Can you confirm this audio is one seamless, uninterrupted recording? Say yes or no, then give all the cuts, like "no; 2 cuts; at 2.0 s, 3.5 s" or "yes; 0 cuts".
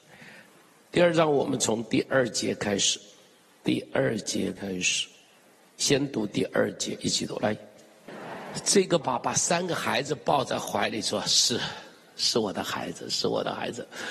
no; 1 cut; at 9.0 s